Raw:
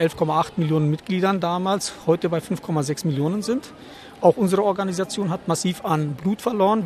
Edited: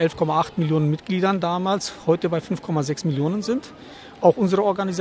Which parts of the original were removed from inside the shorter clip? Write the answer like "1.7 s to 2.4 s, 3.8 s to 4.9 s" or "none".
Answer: none